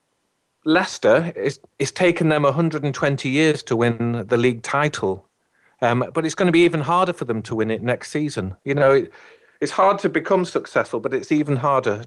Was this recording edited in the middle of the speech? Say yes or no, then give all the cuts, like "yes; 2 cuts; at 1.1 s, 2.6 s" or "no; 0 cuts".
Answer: no; 0 cuts